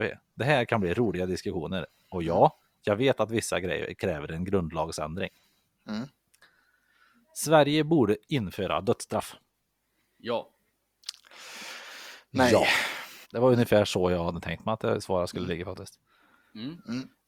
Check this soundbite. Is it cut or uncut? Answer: cut